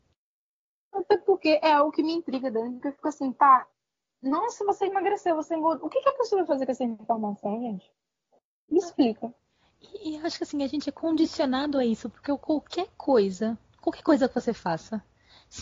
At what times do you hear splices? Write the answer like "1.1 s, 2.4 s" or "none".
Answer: none